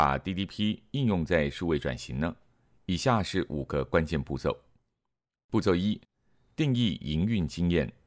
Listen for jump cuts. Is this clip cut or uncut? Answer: uncut